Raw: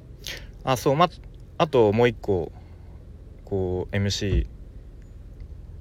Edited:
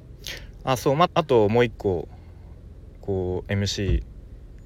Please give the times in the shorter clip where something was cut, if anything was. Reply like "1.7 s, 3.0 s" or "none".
1.1 s

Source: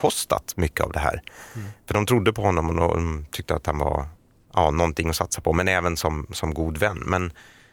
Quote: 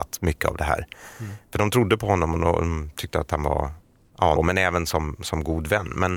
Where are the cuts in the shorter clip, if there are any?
4.4 s

